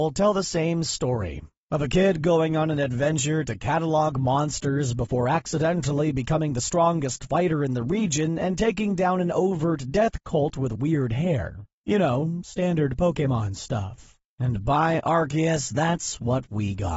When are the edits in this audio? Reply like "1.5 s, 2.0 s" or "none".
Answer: 14.3 s